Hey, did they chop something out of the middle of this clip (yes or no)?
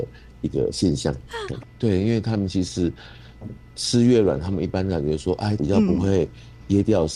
yes